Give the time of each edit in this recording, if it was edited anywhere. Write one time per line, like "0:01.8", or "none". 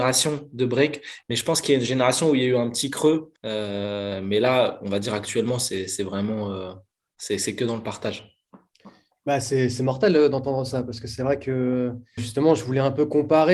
0:01.2
0:03.4
0:12.2